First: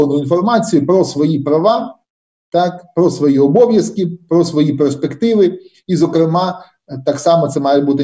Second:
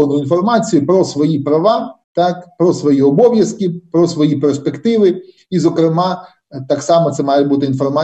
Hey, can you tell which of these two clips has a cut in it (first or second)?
second